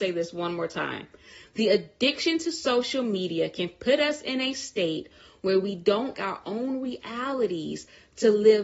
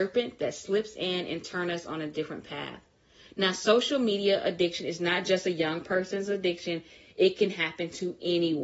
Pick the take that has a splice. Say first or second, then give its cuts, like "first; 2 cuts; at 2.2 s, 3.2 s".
first; 1 cut; at 6.1 s